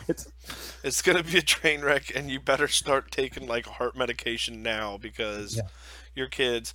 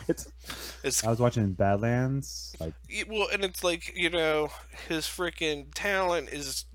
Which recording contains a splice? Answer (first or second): second